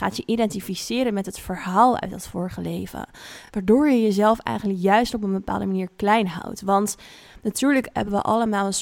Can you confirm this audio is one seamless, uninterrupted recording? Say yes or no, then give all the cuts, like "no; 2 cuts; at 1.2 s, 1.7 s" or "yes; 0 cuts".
yes; 0 cuts